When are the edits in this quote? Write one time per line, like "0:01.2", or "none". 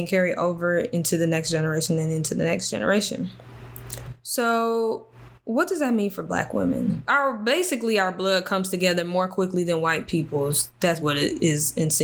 0:07.1
0:11.0

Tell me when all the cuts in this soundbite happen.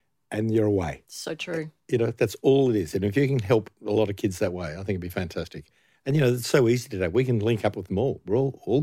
0:01.1

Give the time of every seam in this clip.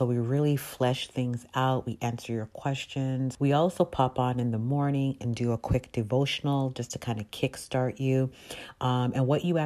0:03.3

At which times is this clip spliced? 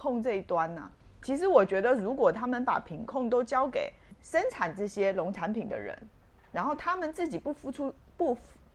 none

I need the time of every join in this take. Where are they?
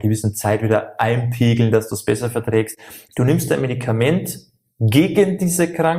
0:03.1

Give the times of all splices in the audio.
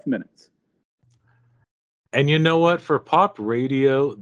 none

